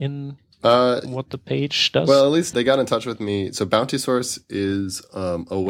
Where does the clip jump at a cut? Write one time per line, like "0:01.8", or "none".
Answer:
0:02.5